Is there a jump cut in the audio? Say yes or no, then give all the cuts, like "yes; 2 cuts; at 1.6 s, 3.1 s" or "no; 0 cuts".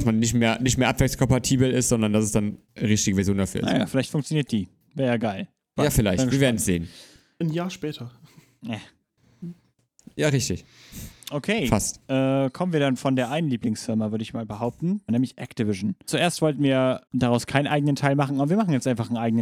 yes; 3 cuts; at 5.8 s, 12.0 s, 15.1 s